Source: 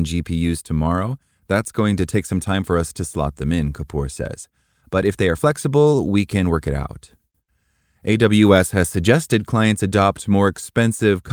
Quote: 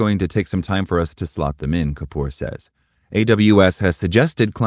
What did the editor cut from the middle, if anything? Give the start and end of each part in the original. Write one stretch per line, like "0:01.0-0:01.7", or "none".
0:04.7-0:07.9